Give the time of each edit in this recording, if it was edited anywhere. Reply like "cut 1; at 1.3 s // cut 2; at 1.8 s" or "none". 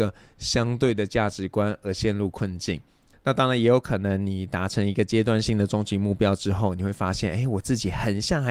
cut 1; at 3.1 s

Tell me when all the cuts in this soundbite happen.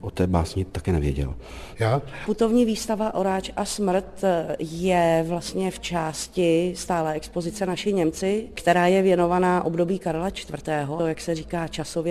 cut 1; at 1.8 s // cut 2; at 11.0 s

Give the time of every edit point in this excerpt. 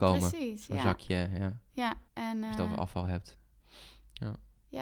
cut 1; at 2.1 s

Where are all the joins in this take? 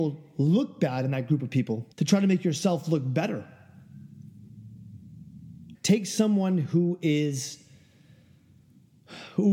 cut 1; at 1.9 s // cut 2; at 5.7 s

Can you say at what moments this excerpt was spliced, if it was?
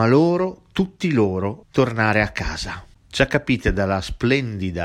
cut 1; at 1.6 s

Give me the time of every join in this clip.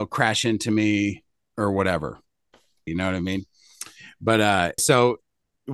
cut 1; at 2.9 s // cut 2; at 4.8 s

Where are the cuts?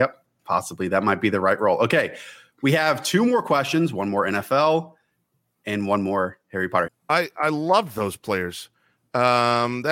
cut 1; at 6.9 s

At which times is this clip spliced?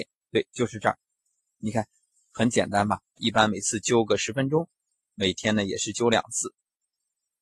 cut 1; at 3.2 s

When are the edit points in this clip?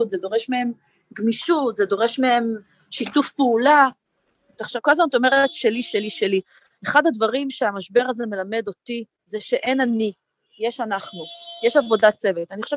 cut 1; at 9.1 s // cut 2; at 11.6 s

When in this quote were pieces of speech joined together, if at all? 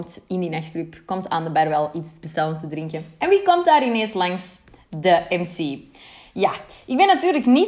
none

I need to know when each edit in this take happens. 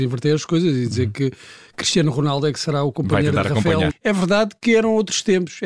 cut 1; at 3.9 s

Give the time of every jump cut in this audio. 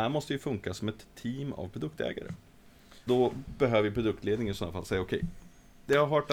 cut 1; at 3.1 s

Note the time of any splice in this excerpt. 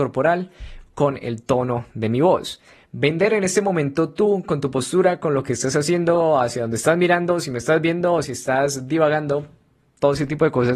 cut 1; at 8.2 s

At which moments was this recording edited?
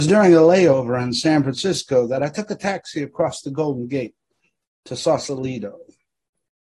none

